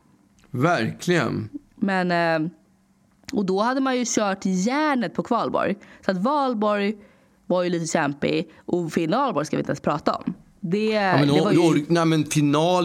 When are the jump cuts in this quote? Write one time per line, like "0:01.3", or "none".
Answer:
none